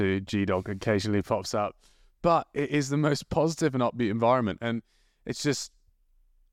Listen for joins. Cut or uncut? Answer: uncut